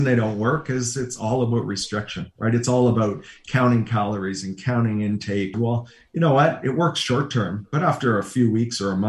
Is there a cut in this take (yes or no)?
yes